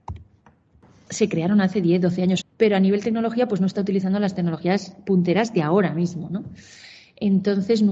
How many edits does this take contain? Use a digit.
2